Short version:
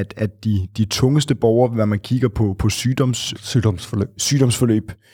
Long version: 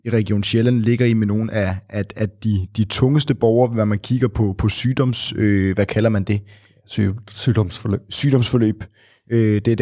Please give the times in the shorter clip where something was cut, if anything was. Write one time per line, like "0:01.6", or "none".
0:03.3